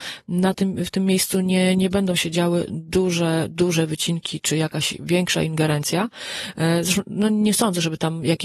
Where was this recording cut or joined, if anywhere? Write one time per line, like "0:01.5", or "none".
none